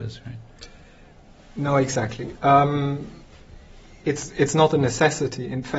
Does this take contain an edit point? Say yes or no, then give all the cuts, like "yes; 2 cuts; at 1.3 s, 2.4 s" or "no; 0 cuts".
no; 0 cuts